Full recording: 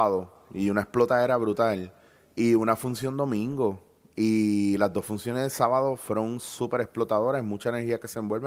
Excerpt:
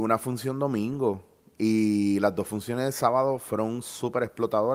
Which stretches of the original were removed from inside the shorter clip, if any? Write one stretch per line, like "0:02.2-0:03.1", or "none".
none